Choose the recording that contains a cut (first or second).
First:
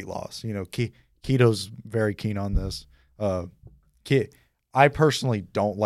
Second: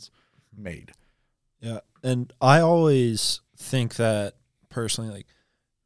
second